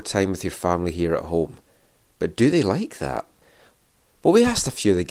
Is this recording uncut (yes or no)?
yes